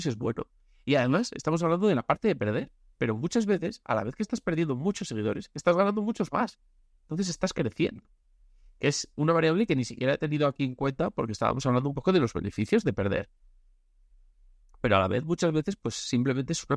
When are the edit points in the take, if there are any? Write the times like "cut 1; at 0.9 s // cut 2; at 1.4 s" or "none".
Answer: none